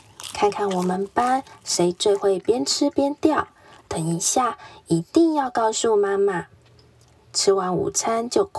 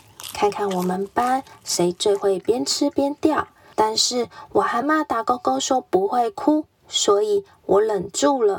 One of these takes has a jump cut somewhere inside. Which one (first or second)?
second